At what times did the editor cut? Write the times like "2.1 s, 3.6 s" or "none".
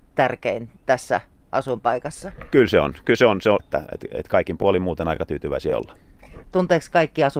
3.6 s